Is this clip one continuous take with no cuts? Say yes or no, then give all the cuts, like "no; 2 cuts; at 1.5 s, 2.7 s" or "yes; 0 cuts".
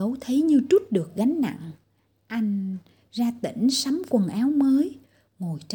yes; 0 cuts